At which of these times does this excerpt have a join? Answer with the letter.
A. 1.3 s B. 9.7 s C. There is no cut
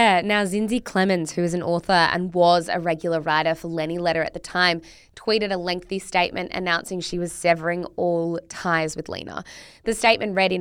C